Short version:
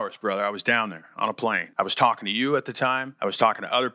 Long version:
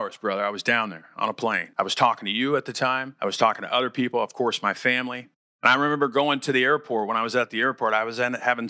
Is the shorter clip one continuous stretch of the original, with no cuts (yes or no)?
yes